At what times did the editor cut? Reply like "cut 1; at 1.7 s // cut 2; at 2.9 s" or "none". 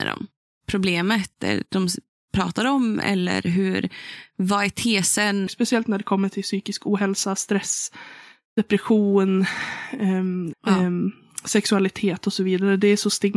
cut 1; at 5.5 s // cut 2; at 10.5 s